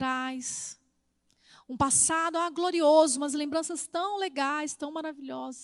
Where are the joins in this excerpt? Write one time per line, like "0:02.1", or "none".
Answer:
none